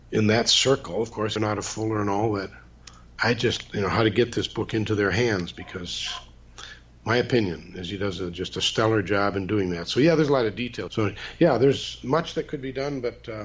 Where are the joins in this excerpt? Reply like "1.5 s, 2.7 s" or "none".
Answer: 1.4 s, 10.9 s